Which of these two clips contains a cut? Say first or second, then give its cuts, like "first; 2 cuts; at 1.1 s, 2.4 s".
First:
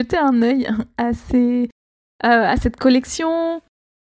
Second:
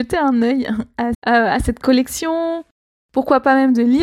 second; 1 cut; at 1.1 s